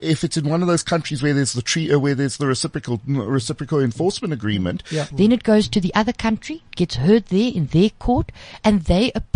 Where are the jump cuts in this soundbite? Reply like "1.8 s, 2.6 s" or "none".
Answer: 5.1 s